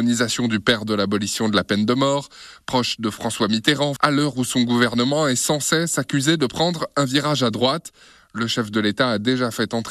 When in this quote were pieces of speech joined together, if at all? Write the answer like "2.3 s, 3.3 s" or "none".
4.0 s